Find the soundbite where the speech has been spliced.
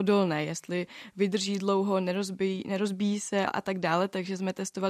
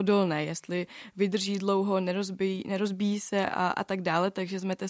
first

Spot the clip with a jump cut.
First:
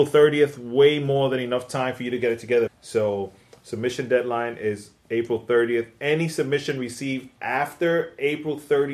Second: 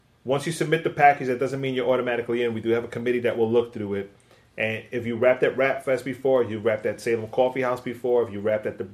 first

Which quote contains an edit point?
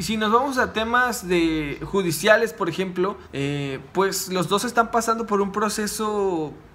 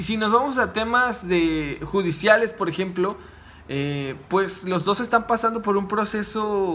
first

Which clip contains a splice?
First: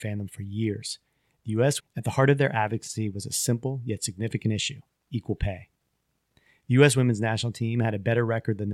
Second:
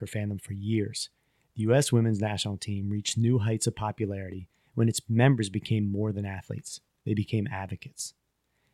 first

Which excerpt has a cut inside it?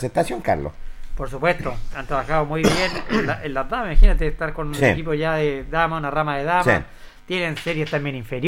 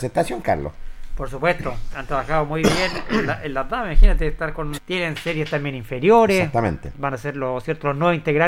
second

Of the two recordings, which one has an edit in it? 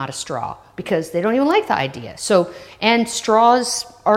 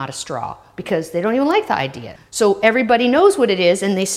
second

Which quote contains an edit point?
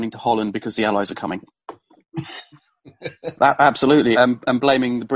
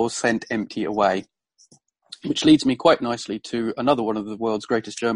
first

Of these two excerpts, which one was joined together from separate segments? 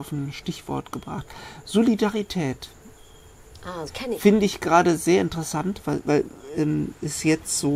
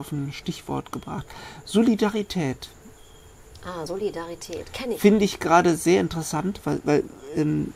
first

